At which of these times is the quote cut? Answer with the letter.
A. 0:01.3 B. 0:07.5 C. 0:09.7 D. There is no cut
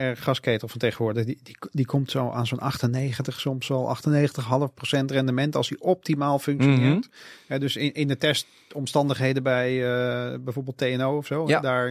D